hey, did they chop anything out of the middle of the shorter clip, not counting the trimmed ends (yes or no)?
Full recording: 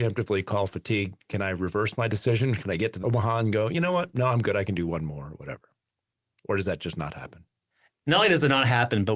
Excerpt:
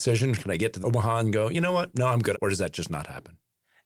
yes